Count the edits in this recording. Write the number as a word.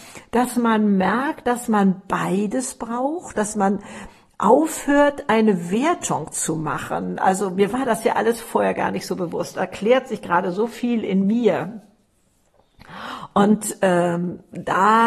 one